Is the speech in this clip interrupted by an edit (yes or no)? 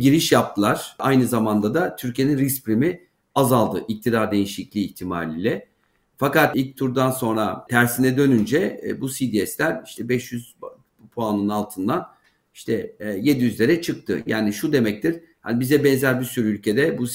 no